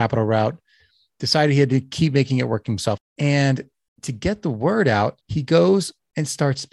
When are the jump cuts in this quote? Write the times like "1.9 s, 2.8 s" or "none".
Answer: 3.0 s, 5.2 s